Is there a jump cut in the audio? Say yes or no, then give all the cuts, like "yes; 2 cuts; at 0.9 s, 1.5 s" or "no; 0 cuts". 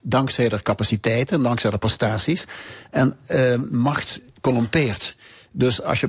no; 0 cuts